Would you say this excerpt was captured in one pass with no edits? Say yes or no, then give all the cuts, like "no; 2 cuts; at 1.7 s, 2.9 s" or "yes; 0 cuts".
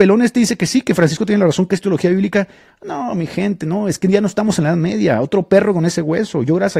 yes; 0 cuts